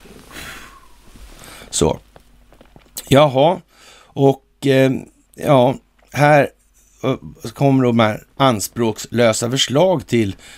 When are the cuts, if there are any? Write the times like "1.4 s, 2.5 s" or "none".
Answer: none